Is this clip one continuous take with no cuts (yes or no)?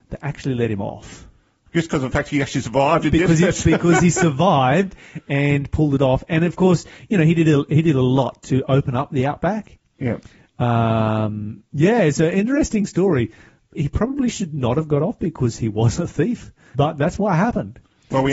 no